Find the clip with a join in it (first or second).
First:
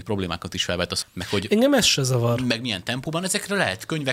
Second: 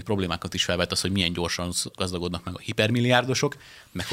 first